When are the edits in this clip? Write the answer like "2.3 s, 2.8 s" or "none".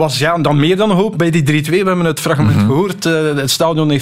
none